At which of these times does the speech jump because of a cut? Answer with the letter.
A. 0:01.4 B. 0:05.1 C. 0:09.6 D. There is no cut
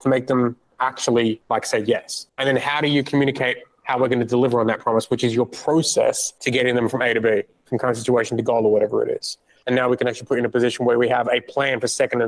C